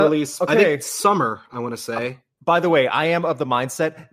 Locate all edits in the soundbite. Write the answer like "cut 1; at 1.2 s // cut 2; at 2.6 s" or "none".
none